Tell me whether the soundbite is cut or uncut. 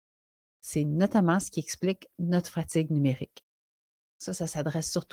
cut